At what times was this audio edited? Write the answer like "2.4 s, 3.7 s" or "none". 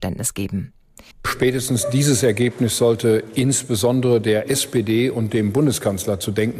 1.1 s